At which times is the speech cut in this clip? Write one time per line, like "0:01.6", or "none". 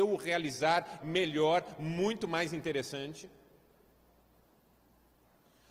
0:01.0